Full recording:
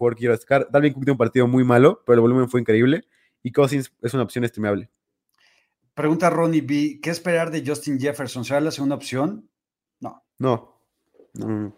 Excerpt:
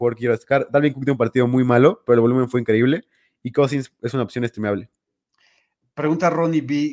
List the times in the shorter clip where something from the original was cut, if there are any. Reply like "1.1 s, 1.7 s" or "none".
none

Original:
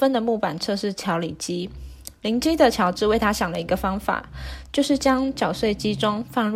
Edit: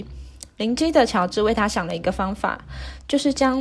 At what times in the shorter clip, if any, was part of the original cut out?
none

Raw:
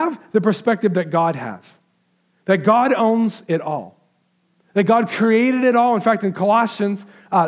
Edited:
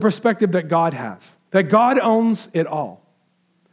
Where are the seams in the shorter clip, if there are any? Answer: 1.4 s

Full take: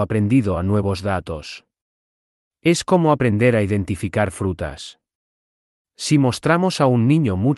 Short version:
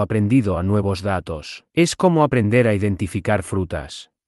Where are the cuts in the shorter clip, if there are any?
1.7 s

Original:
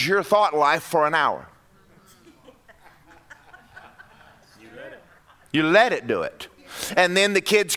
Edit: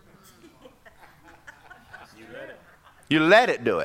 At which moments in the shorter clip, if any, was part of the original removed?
2.0 s

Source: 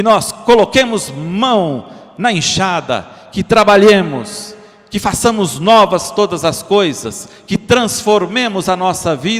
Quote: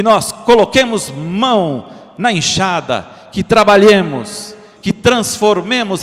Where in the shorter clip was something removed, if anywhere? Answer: 4.8 s

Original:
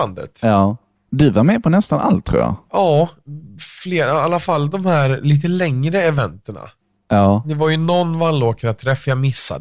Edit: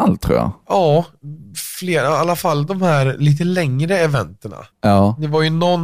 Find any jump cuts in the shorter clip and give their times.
4.7 s

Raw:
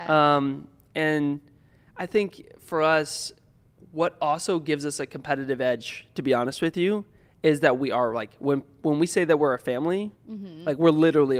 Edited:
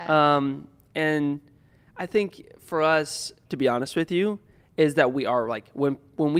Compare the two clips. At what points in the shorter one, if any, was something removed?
3.5 s

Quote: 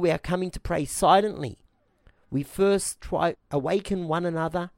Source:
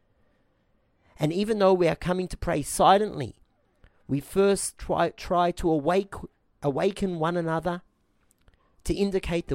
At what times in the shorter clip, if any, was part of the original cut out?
3.3 s

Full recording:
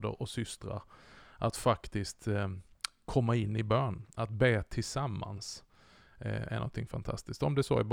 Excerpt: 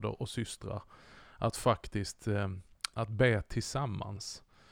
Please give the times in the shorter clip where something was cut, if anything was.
2.9 s

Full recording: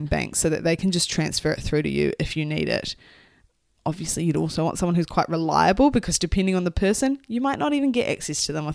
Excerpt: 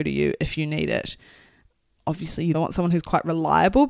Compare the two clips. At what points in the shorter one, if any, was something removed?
2.5 s

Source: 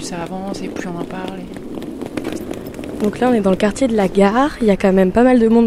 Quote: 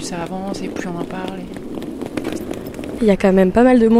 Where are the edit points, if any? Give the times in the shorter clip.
3.0 s

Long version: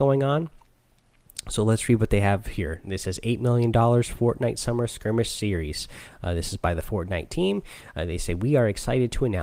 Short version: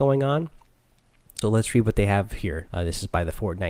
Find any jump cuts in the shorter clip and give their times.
1.4 s, 2.7 s

